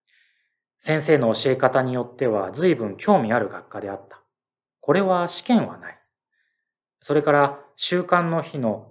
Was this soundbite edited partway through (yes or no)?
no